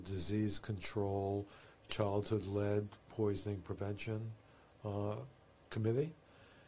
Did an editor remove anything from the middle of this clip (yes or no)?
yes